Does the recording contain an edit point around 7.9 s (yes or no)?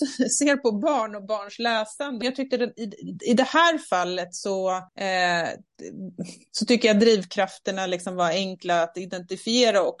no